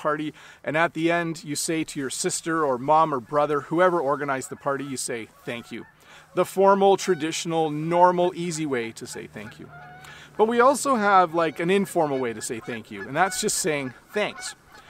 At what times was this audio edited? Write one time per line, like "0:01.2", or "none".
none